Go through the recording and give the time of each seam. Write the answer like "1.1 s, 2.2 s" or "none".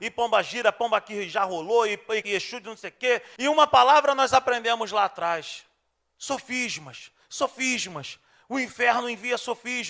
2.2 s, 3.4 s